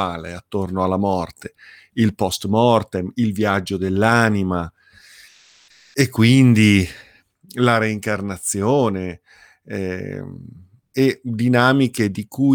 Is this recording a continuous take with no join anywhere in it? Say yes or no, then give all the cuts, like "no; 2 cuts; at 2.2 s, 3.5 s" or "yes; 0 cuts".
yes; 0 cuts